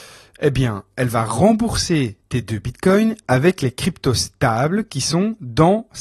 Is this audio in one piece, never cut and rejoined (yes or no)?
yes